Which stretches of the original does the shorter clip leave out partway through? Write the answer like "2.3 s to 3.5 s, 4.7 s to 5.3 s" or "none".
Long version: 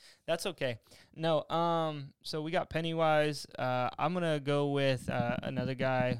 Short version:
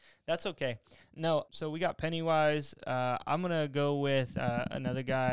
1.5 s to 2.2 s

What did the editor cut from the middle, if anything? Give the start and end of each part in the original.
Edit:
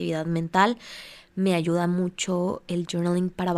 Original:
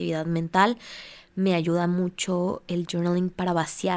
none

